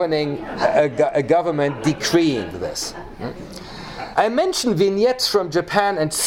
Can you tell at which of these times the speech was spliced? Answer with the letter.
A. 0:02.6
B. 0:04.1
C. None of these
B